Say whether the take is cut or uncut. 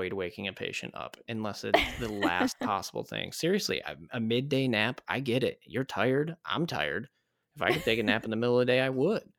uncut